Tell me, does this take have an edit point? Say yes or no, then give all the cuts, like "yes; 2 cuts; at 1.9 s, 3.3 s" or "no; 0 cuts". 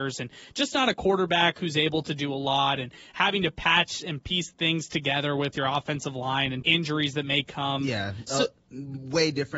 yes; 1 cut; at 6.6 s